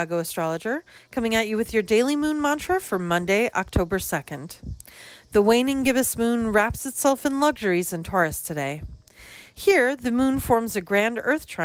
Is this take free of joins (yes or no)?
yes